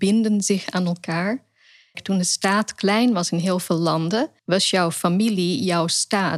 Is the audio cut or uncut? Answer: cut